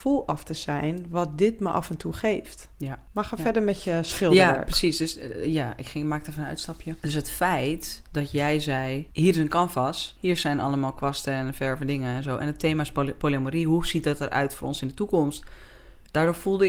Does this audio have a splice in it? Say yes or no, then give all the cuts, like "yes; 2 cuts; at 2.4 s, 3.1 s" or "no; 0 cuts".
no; 0 cuts